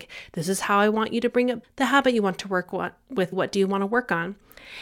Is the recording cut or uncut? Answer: cut